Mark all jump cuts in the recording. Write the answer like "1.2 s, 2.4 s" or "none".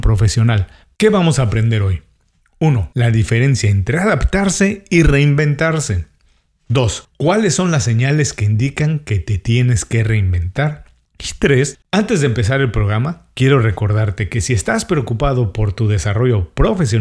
1.0 s, 11.8 s